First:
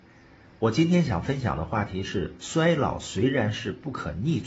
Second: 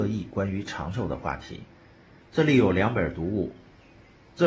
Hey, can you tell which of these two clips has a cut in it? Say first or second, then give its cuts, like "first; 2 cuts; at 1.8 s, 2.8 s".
second; 1 cut; at 2.2 s